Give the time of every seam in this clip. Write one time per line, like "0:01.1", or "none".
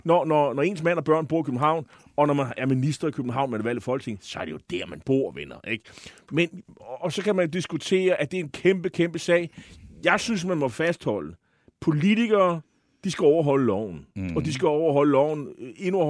none